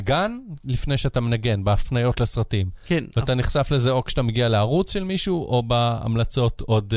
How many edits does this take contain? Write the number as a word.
zero